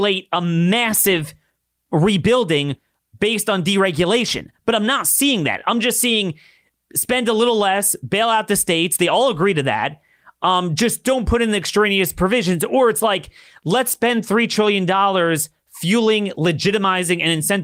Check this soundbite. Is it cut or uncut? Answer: uncut